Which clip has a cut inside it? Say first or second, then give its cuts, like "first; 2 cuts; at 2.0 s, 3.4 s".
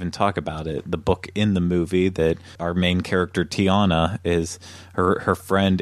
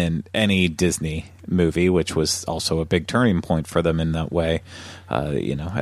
first; 1 cut; at 2.6 s